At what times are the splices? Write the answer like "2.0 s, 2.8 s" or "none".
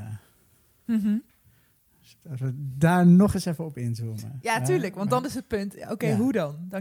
none